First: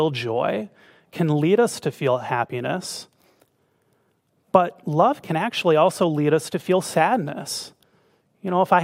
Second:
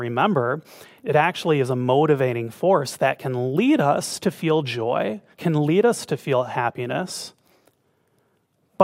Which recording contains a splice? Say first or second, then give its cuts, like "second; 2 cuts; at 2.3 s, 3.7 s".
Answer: second; 2 cuts; at 1.0 s, 5.3 s